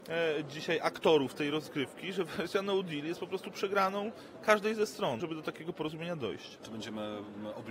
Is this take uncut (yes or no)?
no